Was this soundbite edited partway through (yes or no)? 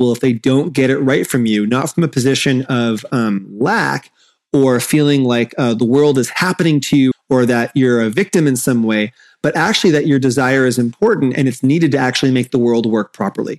yes